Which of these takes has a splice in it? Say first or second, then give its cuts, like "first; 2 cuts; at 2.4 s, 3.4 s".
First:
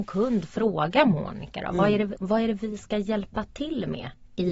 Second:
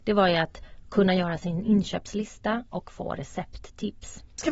first; 1 cut; at 2.2 s